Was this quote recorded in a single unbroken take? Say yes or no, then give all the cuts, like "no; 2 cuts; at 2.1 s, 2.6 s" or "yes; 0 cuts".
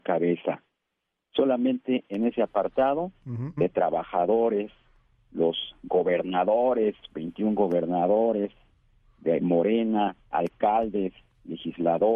no; 1 cut; at 3.6 s